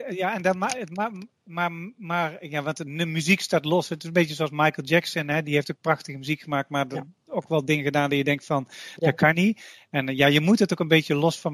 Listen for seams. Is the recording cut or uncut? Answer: uncut